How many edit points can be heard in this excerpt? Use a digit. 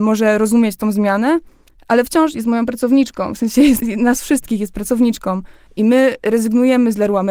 2